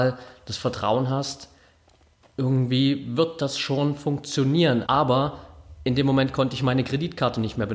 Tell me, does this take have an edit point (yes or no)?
yes